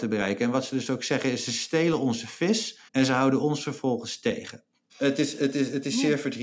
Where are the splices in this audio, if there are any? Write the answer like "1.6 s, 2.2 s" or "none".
2.9 s, 4.9 s